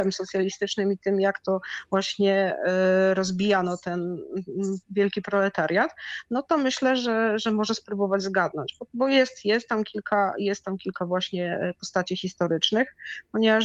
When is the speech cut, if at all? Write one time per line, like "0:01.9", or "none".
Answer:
none